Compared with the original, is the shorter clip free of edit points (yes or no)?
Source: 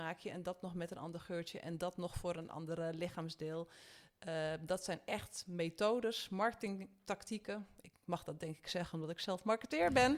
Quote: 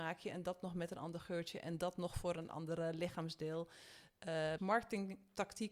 no